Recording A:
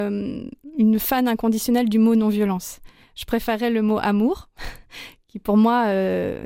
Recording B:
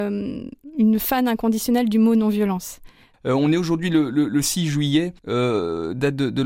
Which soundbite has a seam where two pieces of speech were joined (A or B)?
B